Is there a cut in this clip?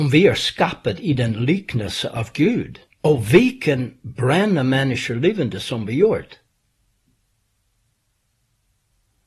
no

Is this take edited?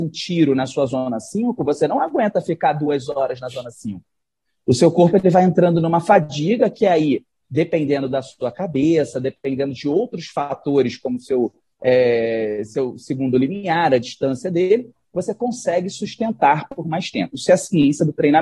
no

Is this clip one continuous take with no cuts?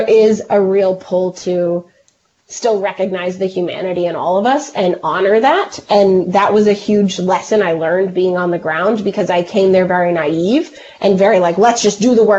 yes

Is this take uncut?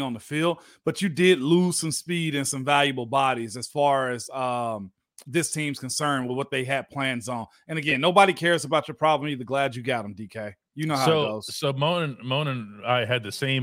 yes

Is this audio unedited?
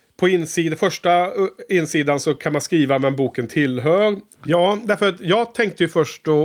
no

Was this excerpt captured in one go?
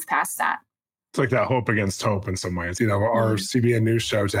no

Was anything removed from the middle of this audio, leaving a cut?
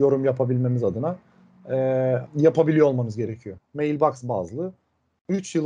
yes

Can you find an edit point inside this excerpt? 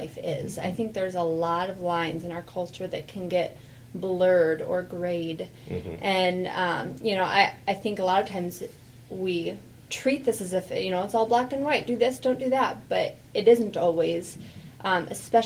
no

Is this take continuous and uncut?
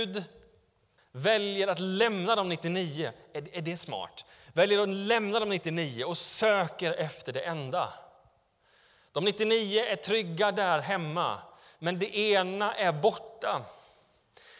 no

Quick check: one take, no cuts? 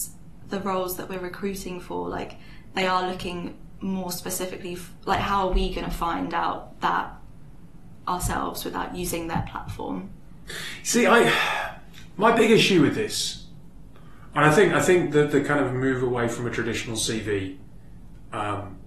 yes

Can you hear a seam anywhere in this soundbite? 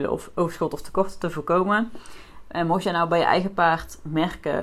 no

